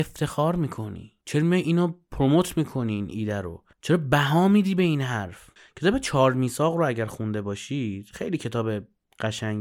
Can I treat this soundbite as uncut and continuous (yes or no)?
no